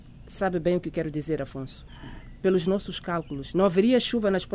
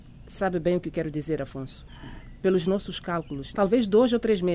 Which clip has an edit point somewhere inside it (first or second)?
second